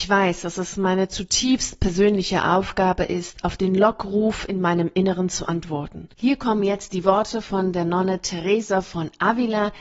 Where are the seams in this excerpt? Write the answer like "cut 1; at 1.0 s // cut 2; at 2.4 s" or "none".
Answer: cut 1; at 6.1 s

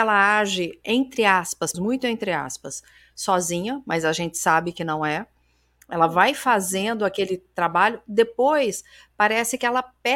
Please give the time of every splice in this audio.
cut 1; at 1.7 s

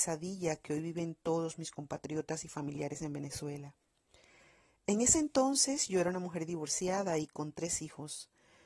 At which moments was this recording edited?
none

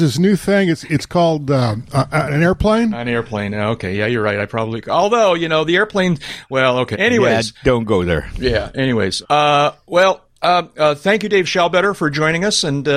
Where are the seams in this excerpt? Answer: cut 1; at 6.9 s // cut 2; at 9.2 s

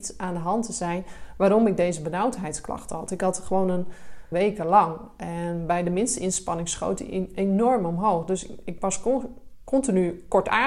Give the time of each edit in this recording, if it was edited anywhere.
cut 1; at 4.3 s

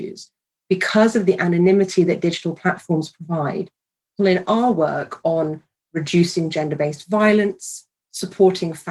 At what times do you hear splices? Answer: cut 1; at 4.2 s

